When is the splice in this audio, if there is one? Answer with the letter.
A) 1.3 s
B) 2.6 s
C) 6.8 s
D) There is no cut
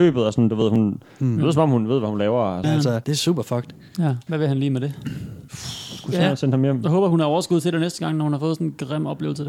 B